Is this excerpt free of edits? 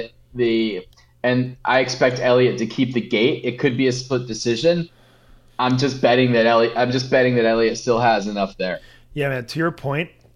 yes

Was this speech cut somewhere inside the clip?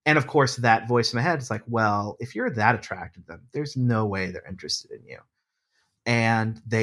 no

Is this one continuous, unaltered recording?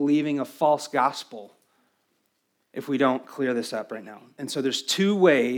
yes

